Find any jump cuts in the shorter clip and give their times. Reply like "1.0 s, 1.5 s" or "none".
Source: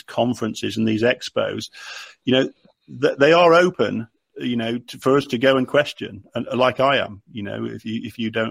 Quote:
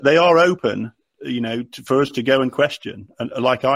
none